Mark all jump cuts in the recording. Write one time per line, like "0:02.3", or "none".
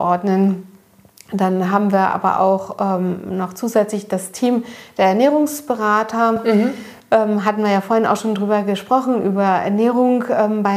none